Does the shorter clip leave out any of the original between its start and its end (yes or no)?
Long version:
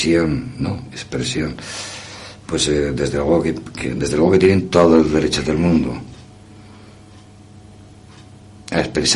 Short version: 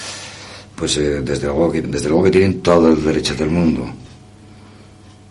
yes